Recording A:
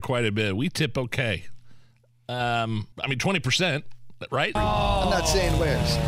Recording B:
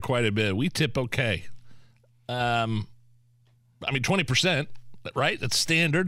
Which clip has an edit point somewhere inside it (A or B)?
A